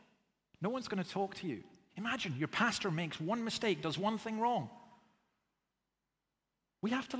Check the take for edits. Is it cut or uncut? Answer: cut